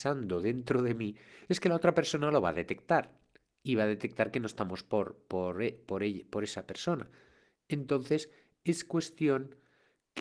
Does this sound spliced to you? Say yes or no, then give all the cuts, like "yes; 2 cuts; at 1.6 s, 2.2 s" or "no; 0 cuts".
no; 0 cuts